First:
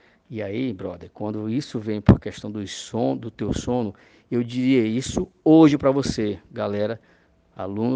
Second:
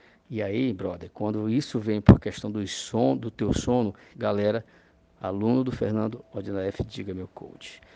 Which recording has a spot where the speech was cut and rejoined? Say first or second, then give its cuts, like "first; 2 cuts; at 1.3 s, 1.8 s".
second; 1 cut; at 4.1 s